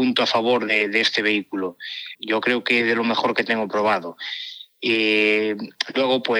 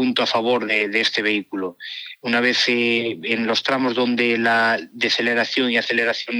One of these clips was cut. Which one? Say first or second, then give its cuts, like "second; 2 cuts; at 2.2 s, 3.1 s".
first; 1 cut; at 2.1 s